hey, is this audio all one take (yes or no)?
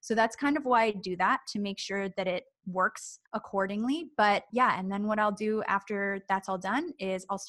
no